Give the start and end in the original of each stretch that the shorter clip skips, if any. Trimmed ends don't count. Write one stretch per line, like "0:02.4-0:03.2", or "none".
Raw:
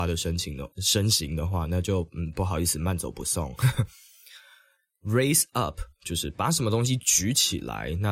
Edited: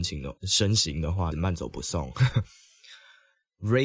0:01.7-0:02.7